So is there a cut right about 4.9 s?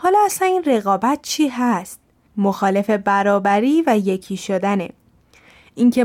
no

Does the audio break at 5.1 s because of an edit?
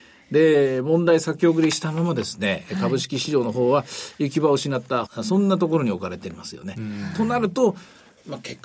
yes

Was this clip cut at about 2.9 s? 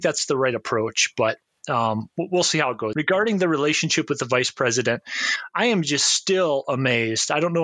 yes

